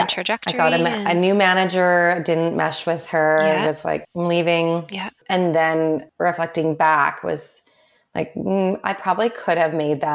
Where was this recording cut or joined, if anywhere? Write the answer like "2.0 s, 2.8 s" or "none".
4.0 s